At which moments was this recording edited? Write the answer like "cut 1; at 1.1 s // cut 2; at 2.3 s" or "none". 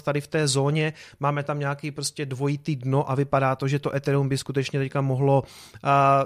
none